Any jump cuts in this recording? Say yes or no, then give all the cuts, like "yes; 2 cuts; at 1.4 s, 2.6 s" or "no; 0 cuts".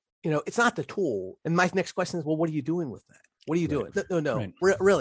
yes; 2 cuts; at 1.4 s, 3.9 s